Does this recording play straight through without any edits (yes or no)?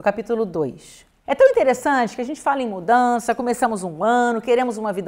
no